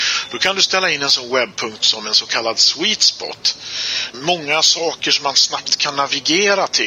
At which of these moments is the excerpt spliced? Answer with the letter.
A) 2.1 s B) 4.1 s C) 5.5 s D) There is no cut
B